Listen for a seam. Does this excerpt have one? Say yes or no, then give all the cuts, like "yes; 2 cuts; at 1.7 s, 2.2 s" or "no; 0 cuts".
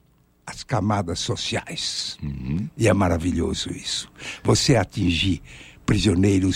no; 0 cuts